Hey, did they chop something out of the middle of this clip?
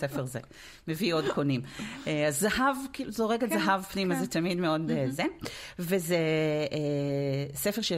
no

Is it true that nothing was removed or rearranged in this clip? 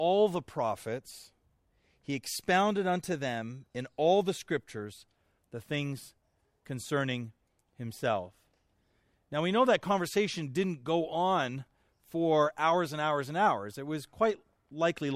yes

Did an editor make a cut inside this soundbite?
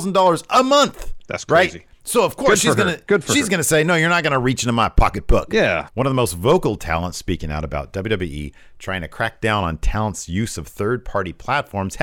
yes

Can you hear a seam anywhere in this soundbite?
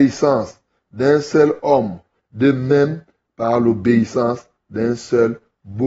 yes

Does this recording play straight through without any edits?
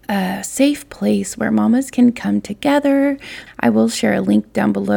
no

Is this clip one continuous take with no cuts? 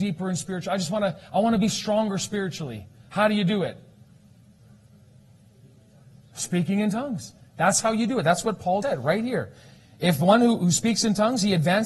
no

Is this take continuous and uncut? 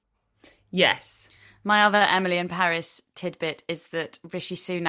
yes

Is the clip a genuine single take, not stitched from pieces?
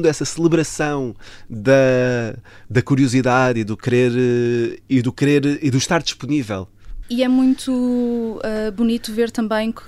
no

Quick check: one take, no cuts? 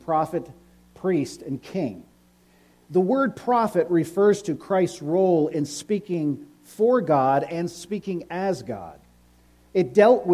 yes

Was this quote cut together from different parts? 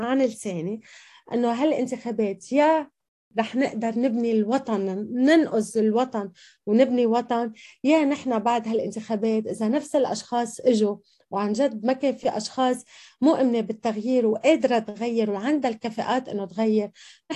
no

